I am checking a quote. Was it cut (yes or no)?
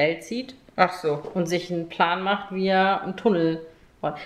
no